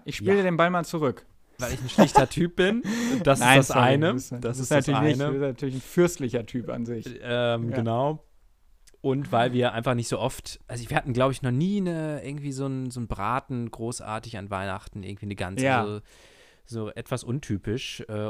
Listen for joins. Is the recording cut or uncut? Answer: cut